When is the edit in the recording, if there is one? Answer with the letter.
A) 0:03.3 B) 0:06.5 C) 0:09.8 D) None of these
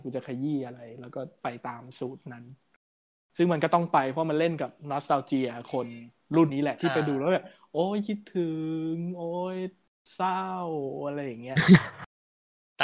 B